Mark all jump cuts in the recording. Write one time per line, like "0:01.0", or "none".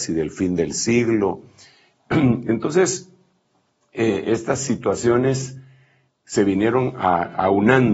none